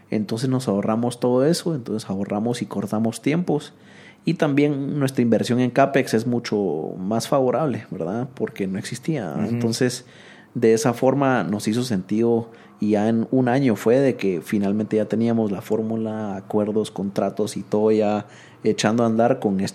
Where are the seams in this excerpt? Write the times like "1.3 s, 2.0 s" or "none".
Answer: none